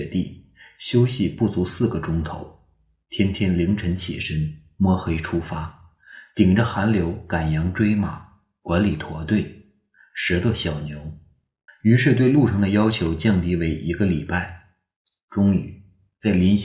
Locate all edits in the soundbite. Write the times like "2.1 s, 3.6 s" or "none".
11.7 s

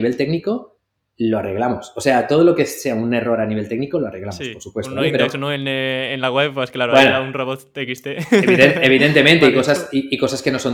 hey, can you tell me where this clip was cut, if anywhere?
none

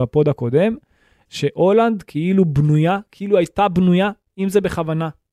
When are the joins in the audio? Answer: none

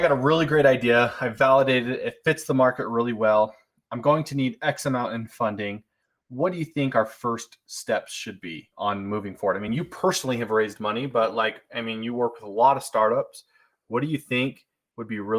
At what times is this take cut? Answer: none

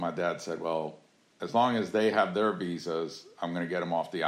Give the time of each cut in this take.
none

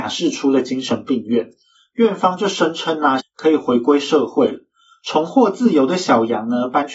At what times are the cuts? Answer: 3.2 s

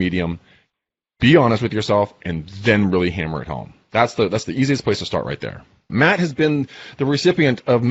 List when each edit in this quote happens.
5.9 s

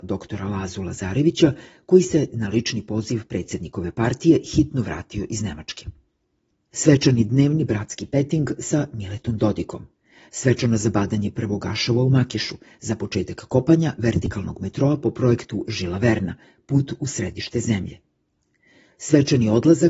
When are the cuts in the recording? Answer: none

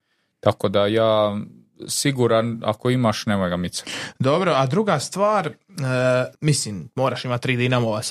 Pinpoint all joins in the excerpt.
6.3 s

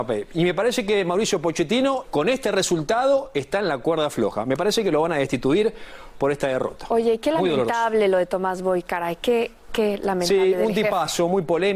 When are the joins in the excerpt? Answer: 2.0 s

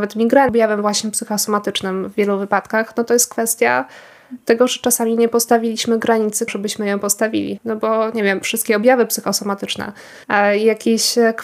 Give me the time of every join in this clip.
6.5 s, 7.6 s, 10.2 s

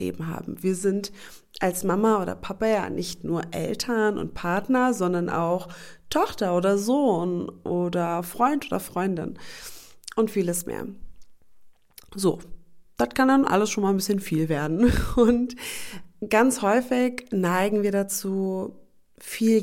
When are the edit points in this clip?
none

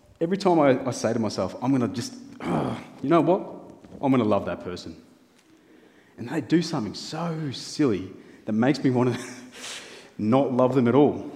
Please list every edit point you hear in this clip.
none

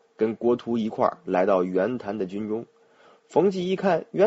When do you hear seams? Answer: none

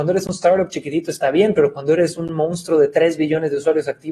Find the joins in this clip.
none

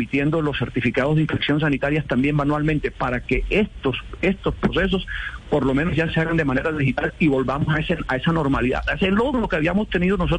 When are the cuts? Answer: none

